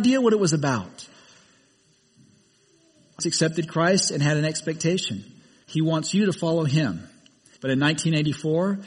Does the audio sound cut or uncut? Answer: cut